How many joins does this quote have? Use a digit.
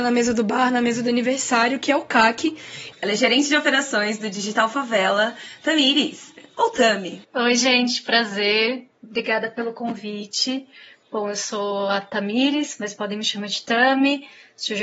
1